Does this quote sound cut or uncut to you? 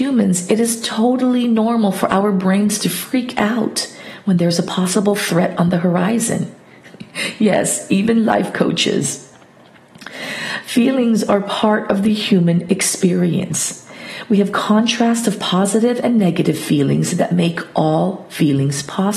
uncut